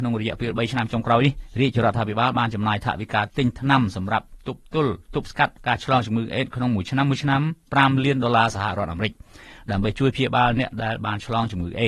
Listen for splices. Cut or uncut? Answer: cut